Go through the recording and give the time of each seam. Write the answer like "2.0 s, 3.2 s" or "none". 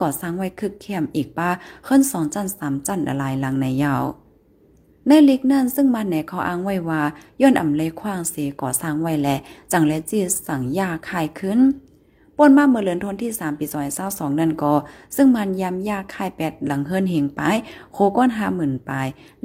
none